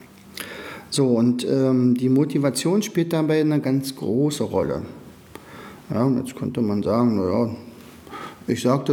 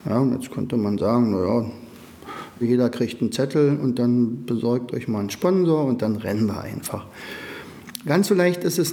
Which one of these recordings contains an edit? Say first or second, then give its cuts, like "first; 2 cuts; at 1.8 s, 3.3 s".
second; 1 cut; at 2.6 s